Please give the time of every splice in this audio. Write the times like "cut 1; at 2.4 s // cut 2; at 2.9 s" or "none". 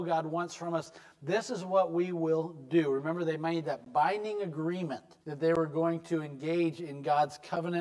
cut 1; at 5.2 s